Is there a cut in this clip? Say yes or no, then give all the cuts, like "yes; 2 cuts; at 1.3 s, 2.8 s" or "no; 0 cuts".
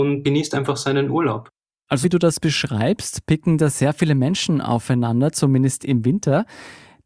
yes; 1 cut; at 2.0 s